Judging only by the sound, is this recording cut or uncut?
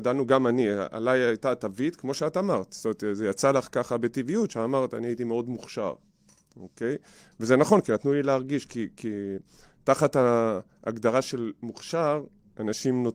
uncut